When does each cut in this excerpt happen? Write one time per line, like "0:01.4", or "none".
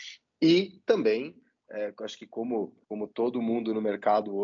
0:02.8